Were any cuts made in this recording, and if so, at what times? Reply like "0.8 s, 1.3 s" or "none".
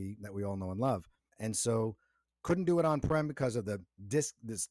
1.3 s